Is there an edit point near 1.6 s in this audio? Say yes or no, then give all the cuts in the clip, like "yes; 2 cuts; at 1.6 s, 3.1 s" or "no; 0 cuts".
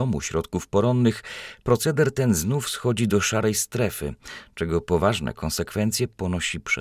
no; 0 cuts